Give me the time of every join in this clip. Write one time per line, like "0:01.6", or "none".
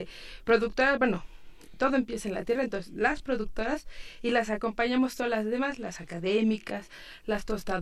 none